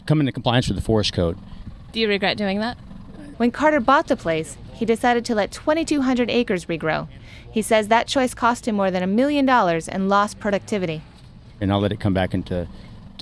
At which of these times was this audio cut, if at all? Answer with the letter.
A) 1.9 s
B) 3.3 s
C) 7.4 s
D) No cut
B